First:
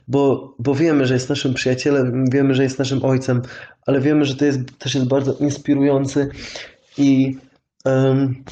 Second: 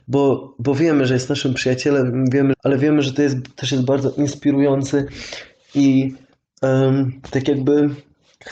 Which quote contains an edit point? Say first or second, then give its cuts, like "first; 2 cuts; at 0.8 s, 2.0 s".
second; 1 cut; at 2.5 s